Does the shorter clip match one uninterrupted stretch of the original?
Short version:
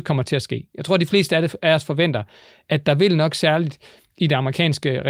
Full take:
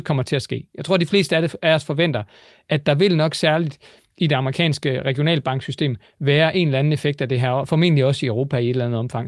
yes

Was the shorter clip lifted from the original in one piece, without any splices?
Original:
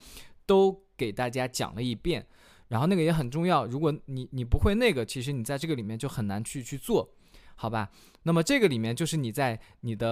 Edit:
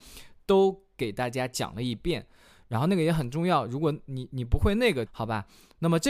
no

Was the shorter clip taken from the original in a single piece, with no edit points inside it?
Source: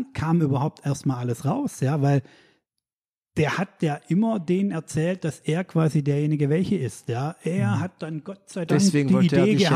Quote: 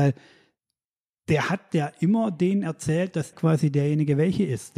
no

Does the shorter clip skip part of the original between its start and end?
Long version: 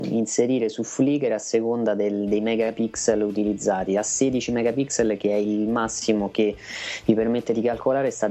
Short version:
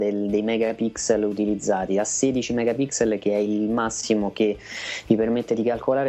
no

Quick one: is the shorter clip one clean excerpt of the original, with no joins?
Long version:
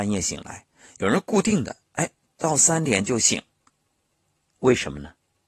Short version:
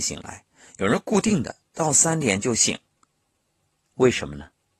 no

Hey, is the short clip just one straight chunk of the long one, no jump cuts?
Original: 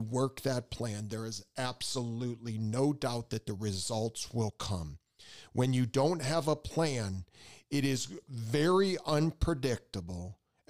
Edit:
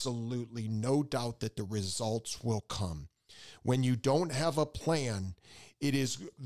yes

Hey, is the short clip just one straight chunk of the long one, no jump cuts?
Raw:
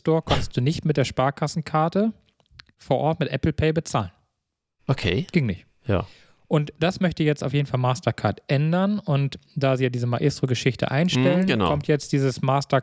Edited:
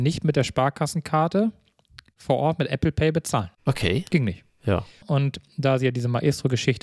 no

